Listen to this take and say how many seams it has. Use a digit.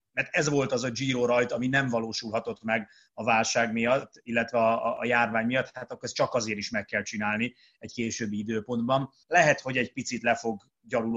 1